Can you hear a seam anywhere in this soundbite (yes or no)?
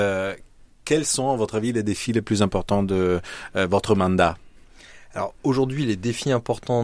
no